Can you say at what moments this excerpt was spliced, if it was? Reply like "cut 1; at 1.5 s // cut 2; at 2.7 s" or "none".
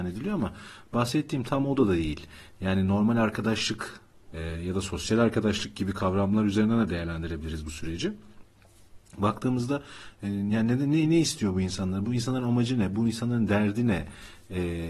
cut 1; at 4.3 s

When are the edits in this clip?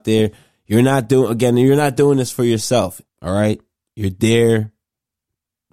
cut 1; at 3.1 s

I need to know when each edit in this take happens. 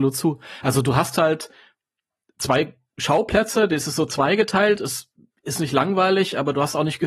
none

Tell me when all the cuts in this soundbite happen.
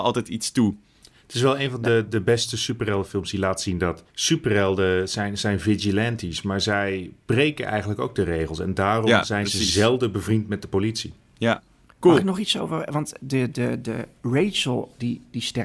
cut 1; at 4.1 s

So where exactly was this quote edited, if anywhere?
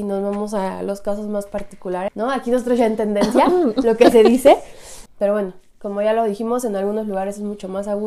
cut 1; at 2.1 s // cut 2; at 5.1 s

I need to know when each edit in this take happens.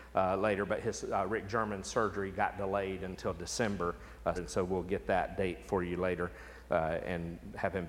cut 1; at 4.3 s

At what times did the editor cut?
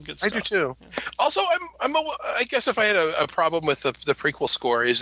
none

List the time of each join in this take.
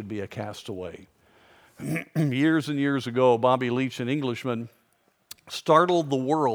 none

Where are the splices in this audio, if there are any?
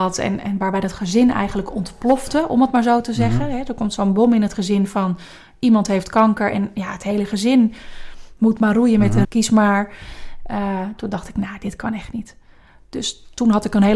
cut 1; at 9.2 s

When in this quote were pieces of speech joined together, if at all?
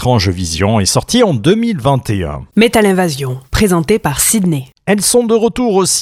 none

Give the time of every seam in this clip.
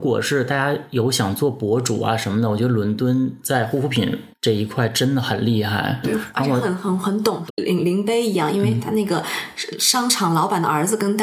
cut 1; at 6.0 s // cut 2; at 7.5 s

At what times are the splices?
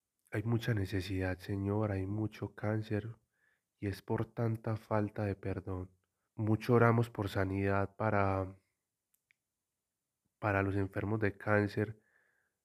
cut 1; at 6.3 s

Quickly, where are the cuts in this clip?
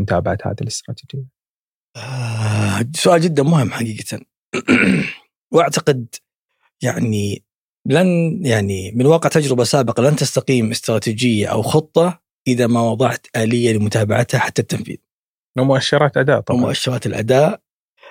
none

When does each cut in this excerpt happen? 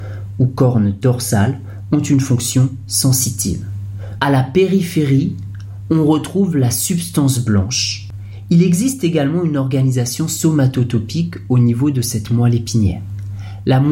cut 1; at 4.2 s

